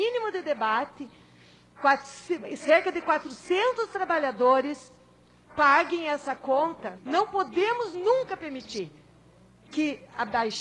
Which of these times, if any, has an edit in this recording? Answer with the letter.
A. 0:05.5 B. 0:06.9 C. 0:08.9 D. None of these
B